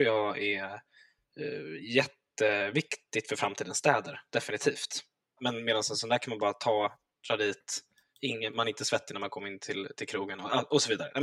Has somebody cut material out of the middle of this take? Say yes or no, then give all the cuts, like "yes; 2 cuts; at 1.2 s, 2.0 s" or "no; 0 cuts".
yes; 1 cut; at 5.4 s